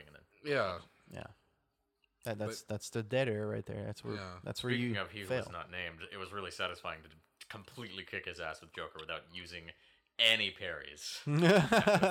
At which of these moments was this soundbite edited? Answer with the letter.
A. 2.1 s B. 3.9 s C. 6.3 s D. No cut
D